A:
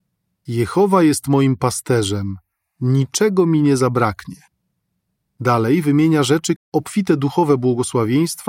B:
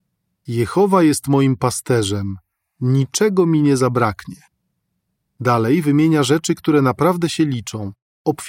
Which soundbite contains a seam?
A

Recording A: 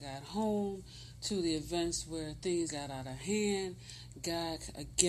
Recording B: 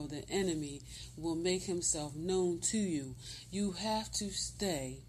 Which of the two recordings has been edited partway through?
A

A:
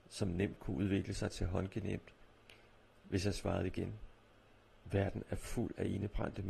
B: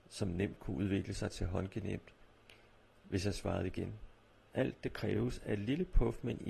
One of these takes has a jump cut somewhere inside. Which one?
B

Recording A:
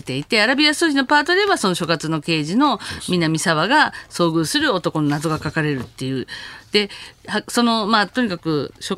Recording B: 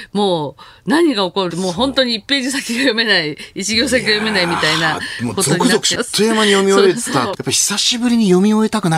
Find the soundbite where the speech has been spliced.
B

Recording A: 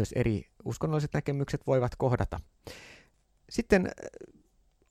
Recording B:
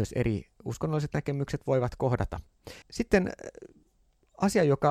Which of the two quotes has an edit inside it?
B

